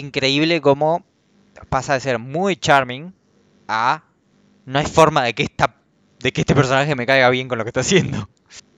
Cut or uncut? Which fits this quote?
uncut